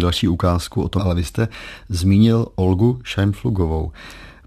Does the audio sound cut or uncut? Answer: cut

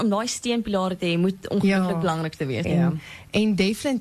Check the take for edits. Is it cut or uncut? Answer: cut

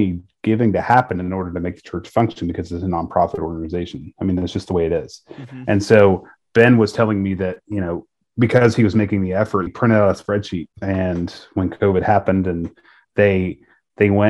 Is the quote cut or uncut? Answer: cut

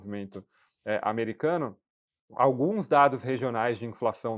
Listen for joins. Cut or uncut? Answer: uncut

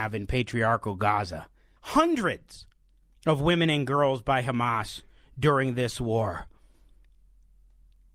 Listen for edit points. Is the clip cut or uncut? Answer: cut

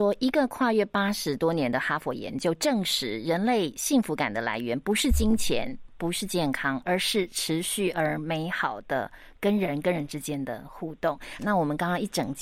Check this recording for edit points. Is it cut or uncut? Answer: uncut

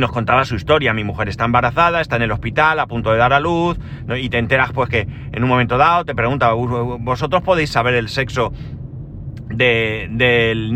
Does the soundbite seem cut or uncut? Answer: uncut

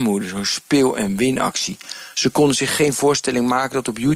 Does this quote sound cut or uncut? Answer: cut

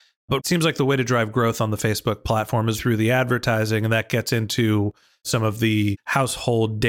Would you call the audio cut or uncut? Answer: cut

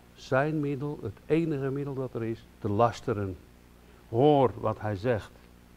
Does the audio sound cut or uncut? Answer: cut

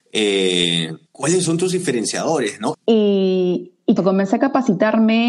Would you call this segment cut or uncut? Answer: cut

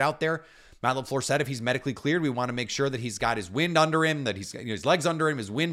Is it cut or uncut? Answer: uncut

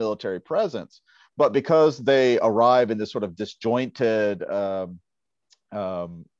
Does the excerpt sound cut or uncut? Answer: uncut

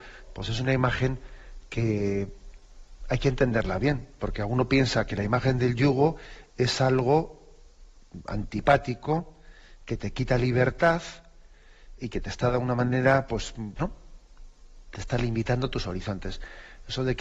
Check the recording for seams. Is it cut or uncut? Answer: cut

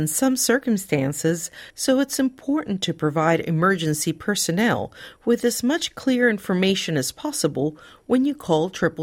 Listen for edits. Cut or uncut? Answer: cut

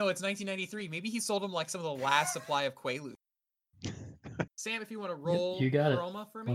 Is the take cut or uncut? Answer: cut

